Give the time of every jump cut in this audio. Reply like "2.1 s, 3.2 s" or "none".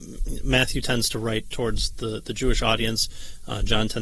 none